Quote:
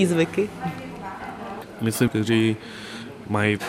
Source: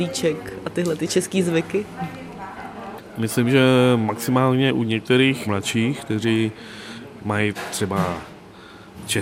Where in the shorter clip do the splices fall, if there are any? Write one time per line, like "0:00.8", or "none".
0:02.1